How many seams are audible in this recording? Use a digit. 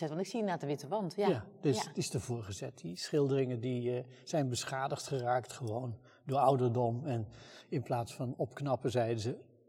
0